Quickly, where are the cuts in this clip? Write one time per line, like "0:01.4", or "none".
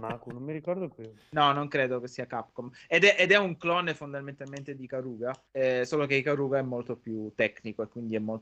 0:05.5